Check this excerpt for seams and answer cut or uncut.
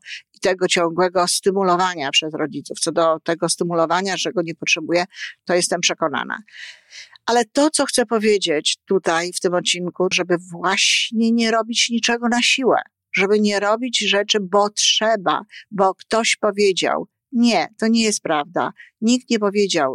cut